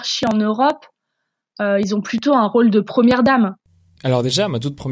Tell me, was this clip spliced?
yes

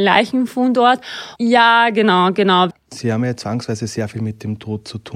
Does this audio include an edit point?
yes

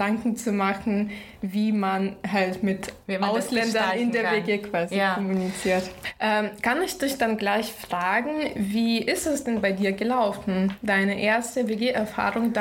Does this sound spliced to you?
no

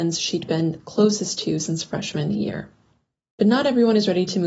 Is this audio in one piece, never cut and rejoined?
yes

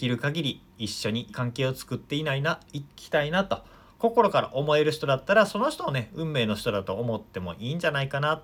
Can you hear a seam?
yes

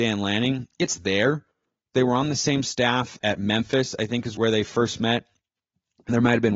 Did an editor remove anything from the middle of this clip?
yes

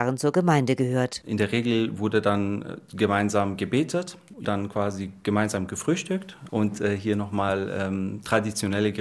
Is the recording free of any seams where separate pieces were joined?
no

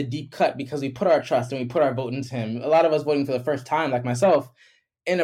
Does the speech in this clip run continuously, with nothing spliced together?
yes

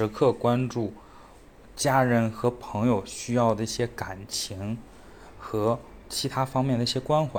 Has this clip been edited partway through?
no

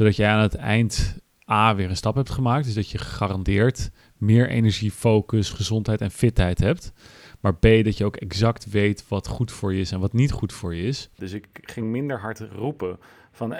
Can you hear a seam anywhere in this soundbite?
yes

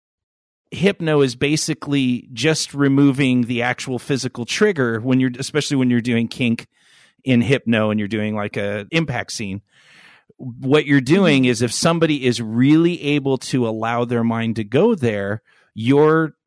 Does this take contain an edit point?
yes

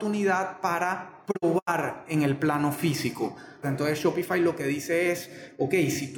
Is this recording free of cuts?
no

